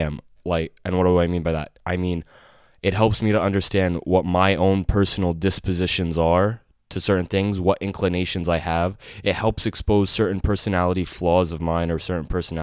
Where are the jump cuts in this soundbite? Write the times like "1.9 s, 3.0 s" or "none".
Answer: none